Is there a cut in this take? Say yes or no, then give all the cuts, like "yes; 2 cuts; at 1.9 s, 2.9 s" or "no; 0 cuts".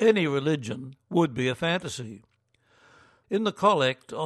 yes; 1 cut; at 3.2 s